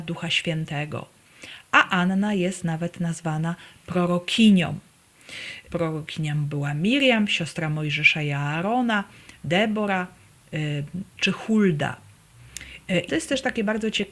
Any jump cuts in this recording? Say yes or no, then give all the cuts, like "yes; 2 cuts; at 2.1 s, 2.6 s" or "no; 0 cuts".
yes; 2 cuts; at 5.7 s, 13.1 s